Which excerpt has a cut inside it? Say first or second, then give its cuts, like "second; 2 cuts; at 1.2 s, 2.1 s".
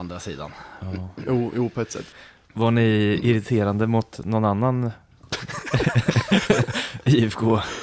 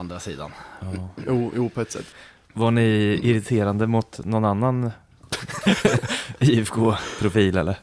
second; 1 cut; at 5.6 s